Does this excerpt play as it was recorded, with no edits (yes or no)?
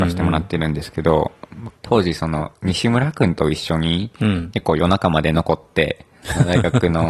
no